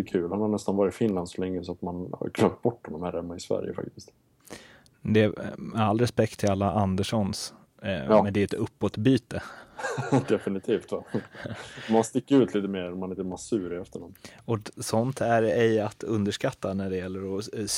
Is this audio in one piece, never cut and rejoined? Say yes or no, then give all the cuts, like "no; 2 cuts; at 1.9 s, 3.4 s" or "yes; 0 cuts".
yes; 0 cuts